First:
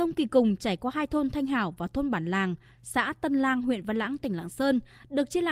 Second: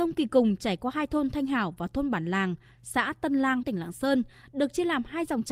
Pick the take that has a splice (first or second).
second